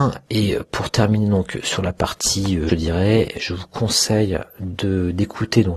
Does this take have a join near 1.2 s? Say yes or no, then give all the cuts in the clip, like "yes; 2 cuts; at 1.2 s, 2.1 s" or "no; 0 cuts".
no; 1 cut; at 2.7 s